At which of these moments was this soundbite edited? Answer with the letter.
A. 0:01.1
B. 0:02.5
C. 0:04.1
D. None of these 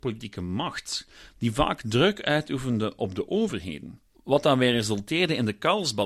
C